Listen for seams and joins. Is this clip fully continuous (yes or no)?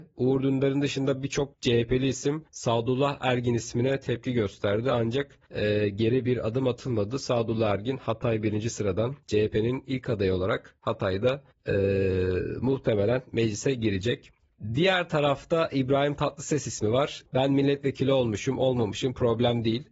no